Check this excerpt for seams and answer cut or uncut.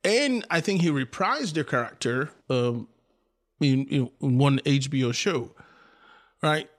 cut